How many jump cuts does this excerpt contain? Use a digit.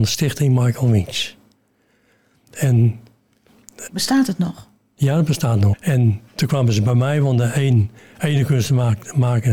2